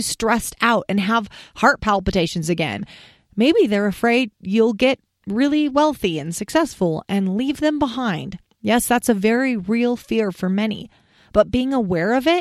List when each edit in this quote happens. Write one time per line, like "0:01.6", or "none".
none